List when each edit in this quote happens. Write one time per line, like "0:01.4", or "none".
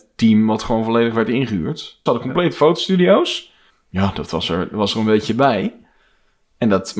0:02.1
0:03.7